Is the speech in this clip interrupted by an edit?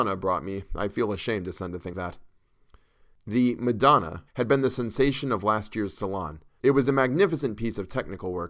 yes; 3 cuts; at 1.9 s, 4.3 s, 6.6 s

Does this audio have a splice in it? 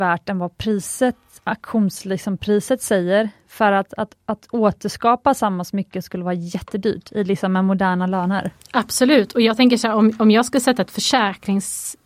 no; 0 cuts

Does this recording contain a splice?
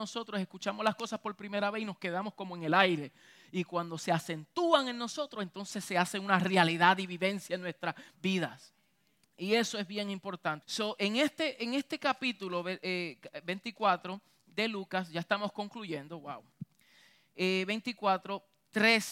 yes; 1 cut; at 10.6 s

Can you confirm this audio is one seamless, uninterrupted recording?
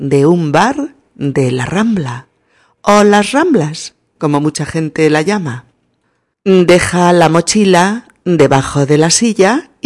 yes; 0 cuts

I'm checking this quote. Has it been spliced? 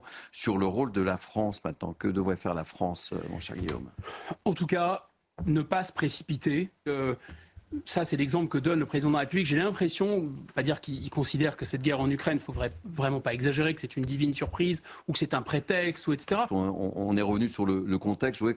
yes; 2 cuts; at 6.9 s, 16.5 s

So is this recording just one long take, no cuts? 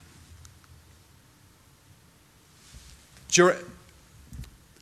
yes; 0 cuts

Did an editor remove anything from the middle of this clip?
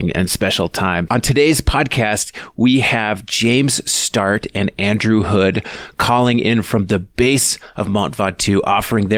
yes; 1 cut; at 1.1 s

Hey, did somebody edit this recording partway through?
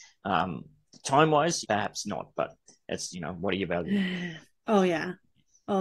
yes; 3 cuts; at 1.6 s, 3.1 s, 4.6 s

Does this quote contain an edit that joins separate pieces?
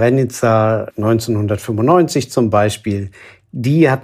yes; 1 cut; at 0.9 s

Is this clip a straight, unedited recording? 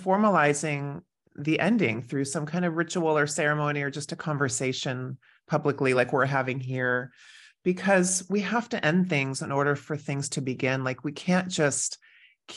yes; 0 cuts

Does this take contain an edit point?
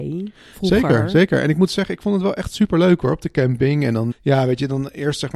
yes; 1 cut; at 4.1 s

